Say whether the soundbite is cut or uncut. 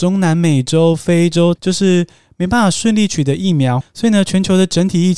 cut